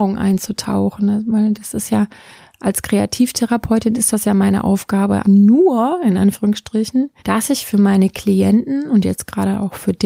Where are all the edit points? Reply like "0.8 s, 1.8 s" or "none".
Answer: 5.2 s, 7.2 s